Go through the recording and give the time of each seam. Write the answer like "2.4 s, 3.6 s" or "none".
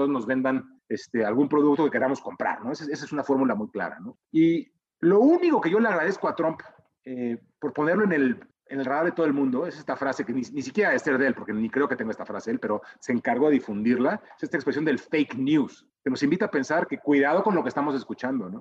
none

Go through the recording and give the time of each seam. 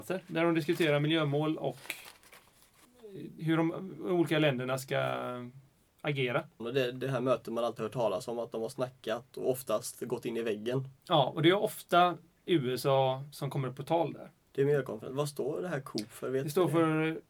6.6 s, 14.5 s

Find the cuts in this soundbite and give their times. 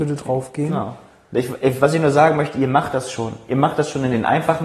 none

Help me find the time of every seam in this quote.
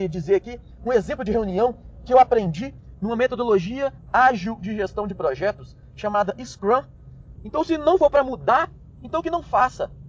7.4 s

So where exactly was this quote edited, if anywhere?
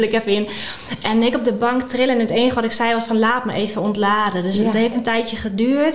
4.9 s

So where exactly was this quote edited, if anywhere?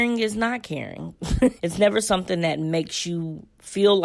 1.6 s

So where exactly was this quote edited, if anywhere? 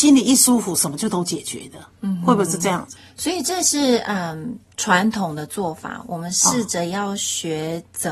none

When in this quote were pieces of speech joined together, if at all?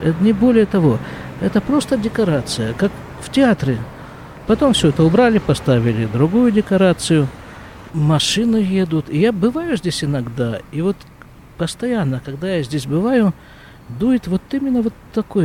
4.5 s, 7.9 s

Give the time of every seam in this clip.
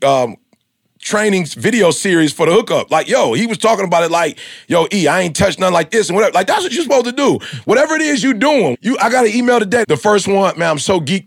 8.7 s, 9.8 s

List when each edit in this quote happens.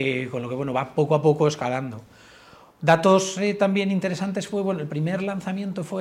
none

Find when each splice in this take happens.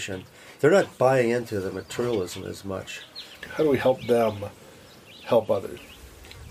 3.4 s

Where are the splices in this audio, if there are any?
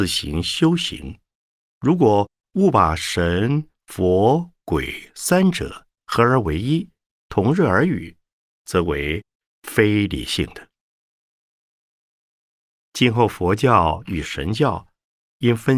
1.6 s

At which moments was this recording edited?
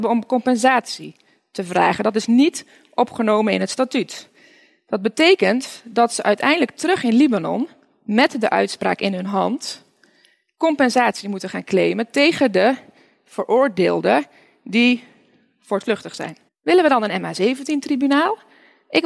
16.5 s

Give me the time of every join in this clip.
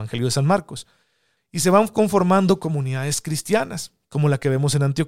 1.4 s

